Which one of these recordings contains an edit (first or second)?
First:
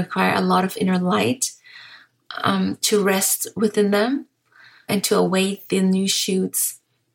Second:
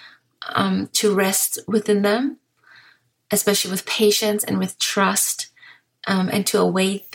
first